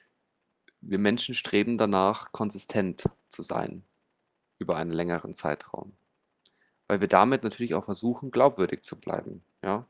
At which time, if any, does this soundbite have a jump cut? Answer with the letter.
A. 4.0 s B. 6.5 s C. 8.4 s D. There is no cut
D